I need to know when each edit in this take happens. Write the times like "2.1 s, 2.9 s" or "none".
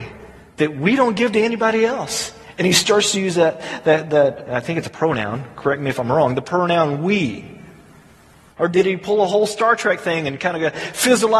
8.6 s